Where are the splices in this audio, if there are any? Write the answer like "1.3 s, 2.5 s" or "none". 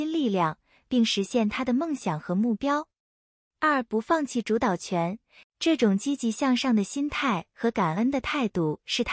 5.4 s